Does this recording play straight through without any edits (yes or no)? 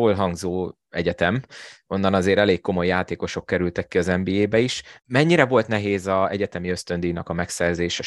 no